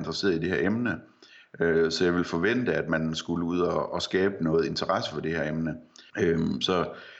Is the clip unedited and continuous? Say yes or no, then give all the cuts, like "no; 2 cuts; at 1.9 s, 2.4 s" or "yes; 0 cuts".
no; 1 cut; at 6.1 s